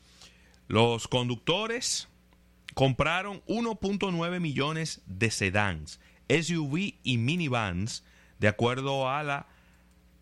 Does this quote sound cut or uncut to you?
uncut